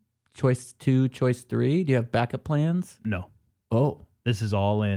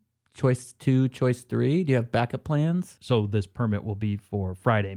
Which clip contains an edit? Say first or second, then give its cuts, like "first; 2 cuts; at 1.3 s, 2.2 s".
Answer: second; 1 cut; at 3.0 s